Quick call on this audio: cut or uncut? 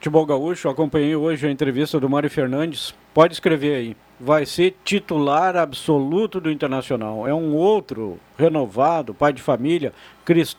uncut